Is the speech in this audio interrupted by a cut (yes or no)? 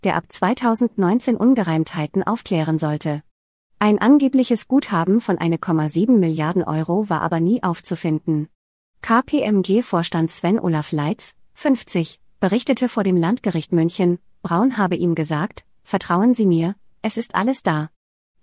no